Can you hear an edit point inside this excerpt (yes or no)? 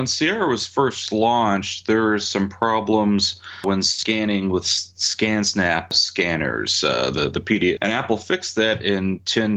yes